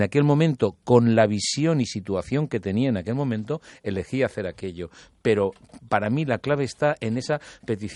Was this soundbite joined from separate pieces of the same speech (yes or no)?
no